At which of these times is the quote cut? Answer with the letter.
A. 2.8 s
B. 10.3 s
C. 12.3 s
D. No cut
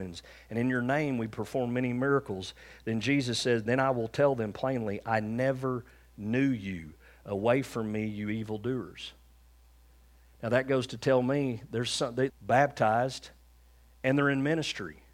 C